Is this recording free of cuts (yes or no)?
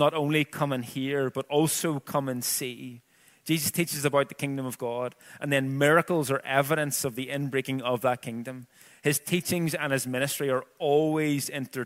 yes